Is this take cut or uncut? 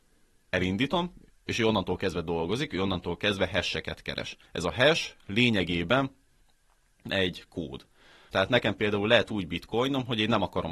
cut